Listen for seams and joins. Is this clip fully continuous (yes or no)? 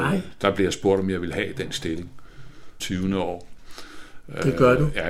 no